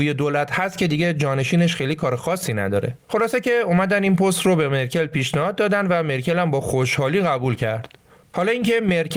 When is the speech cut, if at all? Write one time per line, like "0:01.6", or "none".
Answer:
0:03.0